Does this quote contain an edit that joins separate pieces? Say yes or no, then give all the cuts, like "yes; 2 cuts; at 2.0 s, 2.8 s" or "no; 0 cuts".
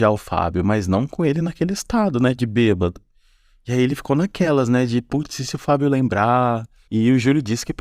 yes; 1 cut; at 6.9 s